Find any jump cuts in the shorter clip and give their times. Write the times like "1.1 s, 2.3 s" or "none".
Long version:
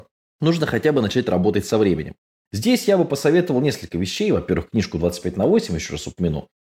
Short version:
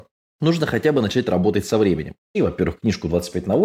2.3 s